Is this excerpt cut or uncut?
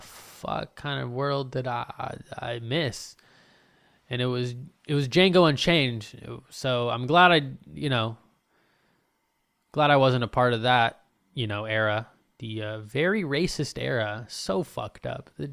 uncut